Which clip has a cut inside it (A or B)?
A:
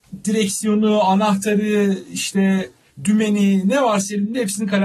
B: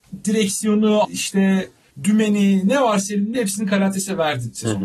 B